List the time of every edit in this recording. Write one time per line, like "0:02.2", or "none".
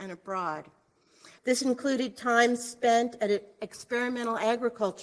0:01.4